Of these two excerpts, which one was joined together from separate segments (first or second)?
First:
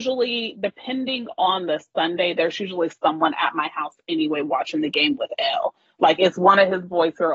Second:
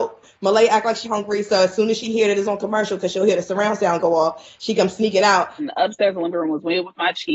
second